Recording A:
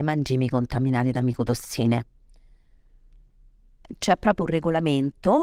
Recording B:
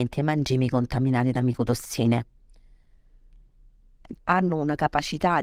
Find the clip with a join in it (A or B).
B